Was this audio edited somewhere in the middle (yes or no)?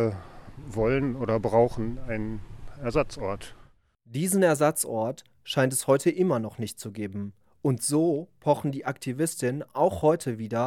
no